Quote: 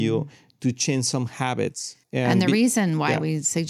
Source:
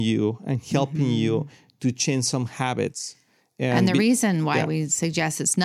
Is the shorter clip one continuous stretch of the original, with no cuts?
no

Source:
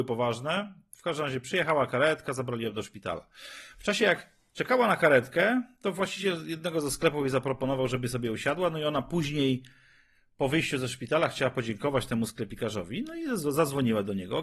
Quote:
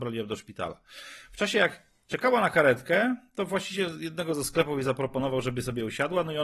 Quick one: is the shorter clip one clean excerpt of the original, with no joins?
yes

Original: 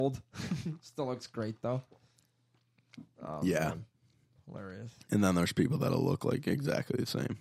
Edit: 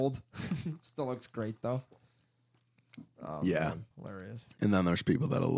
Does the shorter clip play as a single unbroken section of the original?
no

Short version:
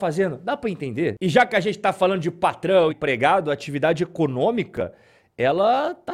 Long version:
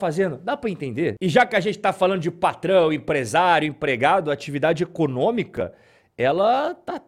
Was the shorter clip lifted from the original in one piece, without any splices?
no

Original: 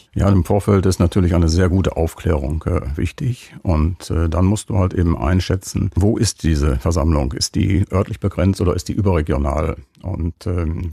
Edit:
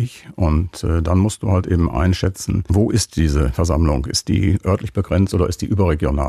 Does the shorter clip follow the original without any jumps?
yes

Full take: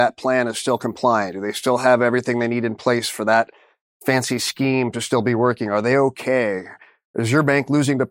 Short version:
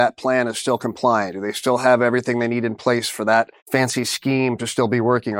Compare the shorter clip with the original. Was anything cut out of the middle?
yes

